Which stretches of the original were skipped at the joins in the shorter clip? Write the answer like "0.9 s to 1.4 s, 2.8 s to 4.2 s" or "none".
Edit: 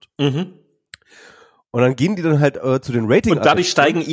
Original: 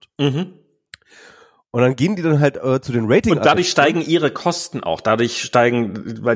none